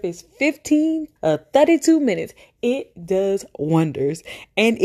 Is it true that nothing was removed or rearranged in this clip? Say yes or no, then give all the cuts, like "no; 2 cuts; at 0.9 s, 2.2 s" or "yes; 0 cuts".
no; 1 cut; at 1.2 s